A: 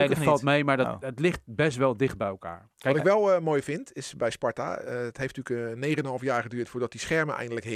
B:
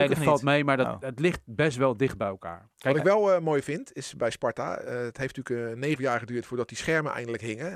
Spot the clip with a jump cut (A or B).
B